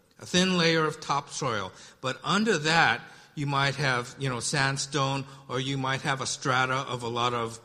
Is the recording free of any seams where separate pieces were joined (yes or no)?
yes